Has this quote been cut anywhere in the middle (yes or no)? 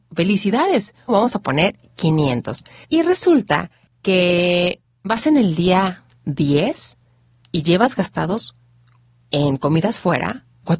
yes